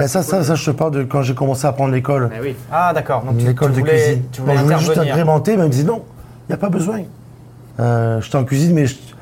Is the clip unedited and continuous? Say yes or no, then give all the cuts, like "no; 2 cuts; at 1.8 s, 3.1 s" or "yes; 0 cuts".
no; 1 cut; at 7.7 s